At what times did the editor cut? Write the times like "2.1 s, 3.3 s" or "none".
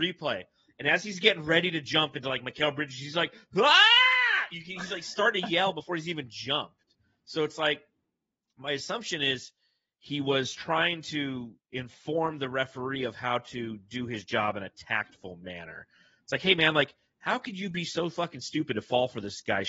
none